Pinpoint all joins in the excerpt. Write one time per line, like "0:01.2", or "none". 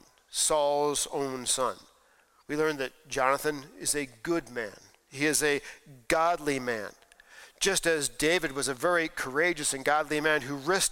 none